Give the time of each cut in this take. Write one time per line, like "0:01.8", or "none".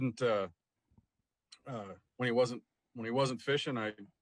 none